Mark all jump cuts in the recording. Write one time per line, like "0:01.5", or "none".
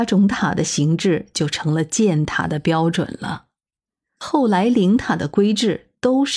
none